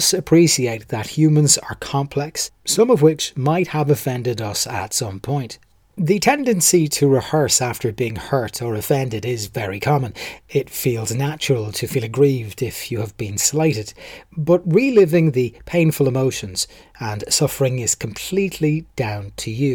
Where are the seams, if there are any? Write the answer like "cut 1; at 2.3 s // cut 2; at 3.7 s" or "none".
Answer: cut 1; at 2.5 s